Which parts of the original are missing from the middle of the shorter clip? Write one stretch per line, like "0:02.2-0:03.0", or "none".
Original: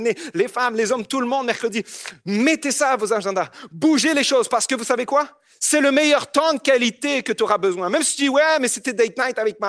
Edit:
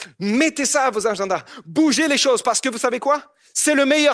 none